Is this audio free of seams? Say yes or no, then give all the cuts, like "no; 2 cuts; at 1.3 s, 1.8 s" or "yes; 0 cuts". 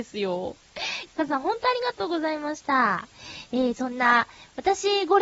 no; 1 cut; at 1.1 s